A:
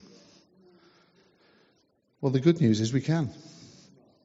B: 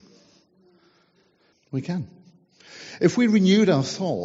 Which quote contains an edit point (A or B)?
B